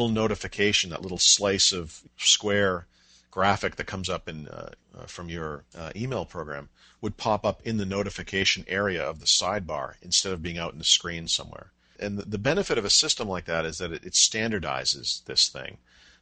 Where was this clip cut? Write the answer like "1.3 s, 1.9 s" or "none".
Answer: none